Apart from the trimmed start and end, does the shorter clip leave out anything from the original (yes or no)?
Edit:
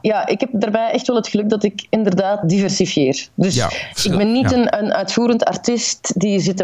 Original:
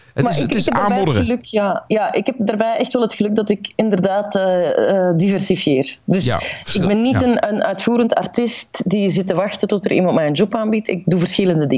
yes